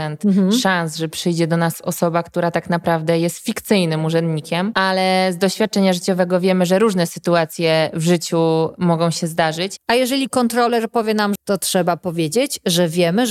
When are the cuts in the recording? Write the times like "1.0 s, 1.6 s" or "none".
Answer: 9.8 s, 11.4 s

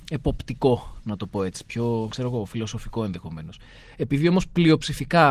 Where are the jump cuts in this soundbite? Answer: 3.8 s

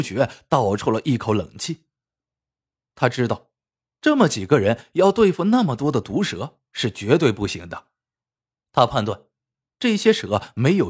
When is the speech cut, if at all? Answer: none

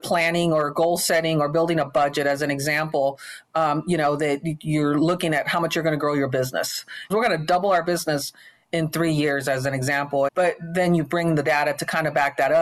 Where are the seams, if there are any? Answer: 7.1 s, 10.3 s

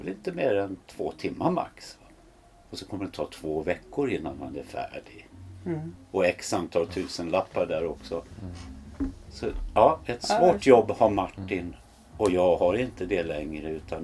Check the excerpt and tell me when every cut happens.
none

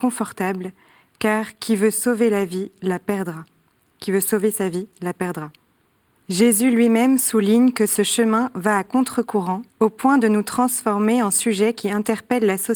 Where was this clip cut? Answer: 6.2 s, 9.7 s

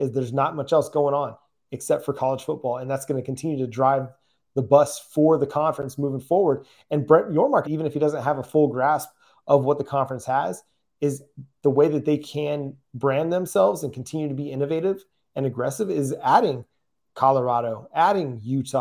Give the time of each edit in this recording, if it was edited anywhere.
7.6 s

